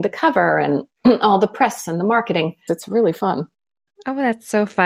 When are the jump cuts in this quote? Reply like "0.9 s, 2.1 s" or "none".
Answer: 2.7 s